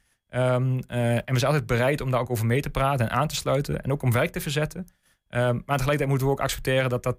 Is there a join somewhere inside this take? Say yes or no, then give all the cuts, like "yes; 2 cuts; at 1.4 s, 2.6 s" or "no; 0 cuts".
no; 0 cuts